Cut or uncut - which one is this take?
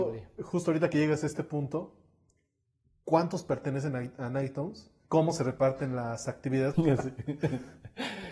cut